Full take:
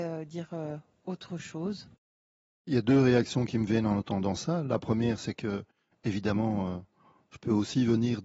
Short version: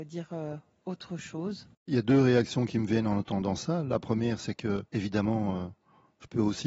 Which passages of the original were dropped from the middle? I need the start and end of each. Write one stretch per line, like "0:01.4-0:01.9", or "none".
0:02.0-0:02.5
0:05.7-0:06.0